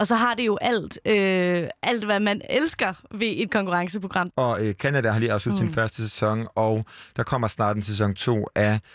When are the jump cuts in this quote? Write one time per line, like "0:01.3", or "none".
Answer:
0:04.3